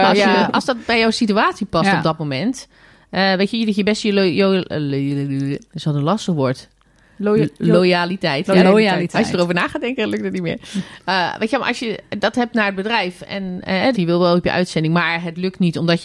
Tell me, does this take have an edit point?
yes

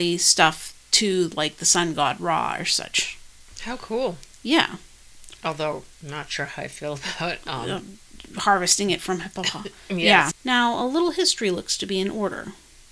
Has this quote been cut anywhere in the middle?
yes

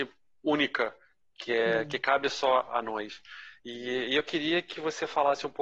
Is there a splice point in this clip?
no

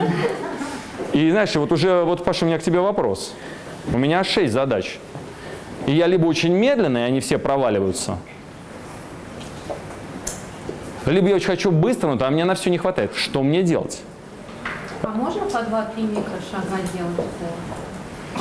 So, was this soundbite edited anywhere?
no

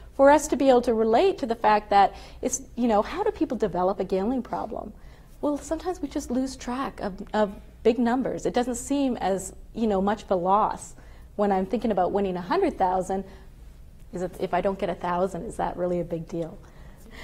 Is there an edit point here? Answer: no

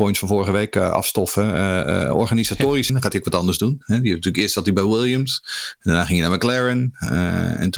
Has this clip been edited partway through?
yes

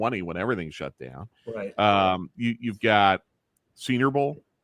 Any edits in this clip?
no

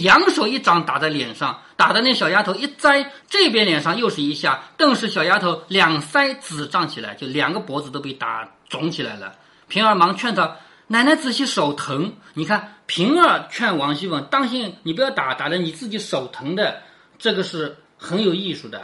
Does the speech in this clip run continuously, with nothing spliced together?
yes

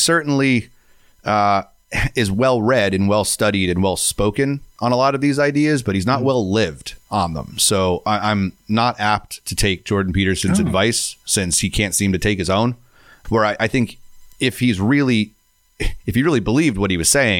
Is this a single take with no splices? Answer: no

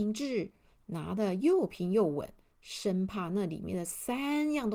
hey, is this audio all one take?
yes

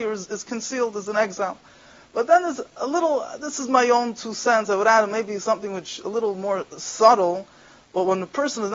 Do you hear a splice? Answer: no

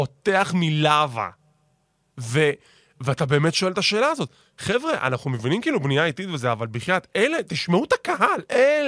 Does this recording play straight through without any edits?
yes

